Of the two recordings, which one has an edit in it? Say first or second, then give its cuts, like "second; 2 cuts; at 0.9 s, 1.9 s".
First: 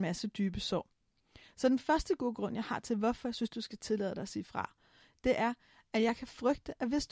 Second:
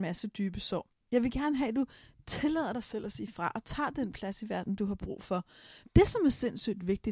second; 2 cuts; at 1.1 s, 5.8 s